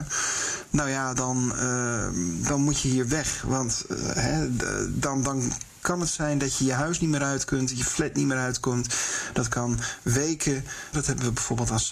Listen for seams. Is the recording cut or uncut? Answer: cut